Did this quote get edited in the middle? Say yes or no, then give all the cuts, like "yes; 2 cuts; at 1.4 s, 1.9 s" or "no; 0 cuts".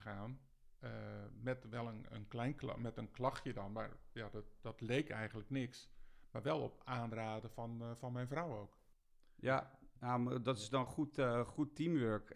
no; 0 cuts